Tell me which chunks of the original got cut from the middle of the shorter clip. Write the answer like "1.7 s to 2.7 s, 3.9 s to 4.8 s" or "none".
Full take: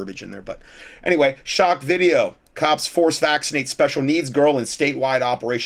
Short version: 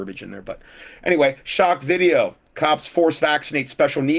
none